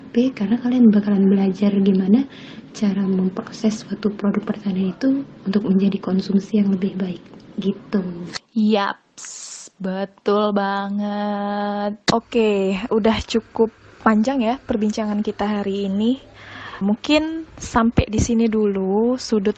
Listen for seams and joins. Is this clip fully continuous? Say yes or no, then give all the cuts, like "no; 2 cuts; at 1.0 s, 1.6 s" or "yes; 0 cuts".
no; 2 cuts; at 12.9 s, 16.8 s